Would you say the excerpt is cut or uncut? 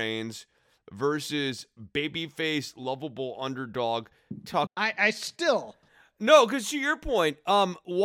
cut